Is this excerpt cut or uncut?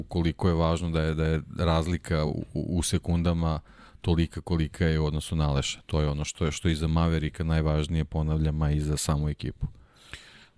uncut